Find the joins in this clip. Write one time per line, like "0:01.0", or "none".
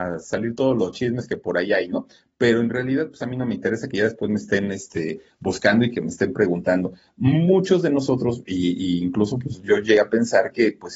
none